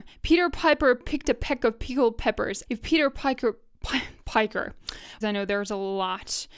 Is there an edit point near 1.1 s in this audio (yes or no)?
no